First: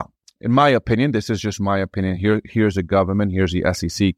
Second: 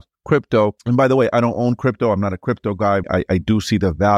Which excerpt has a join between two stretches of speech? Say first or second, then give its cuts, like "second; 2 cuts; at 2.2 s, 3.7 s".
second; 1 cut; at 3.0 s